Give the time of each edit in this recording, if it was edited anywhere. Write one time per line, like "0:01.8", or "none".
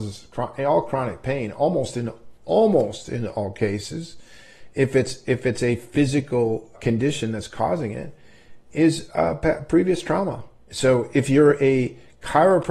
0:06.7
0:10.6